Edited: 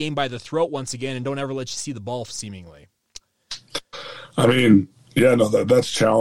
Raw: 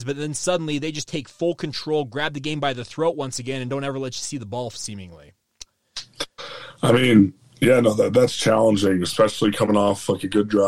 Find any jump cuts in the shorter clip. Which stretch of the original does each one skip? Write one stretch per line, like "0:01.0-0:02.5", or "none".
none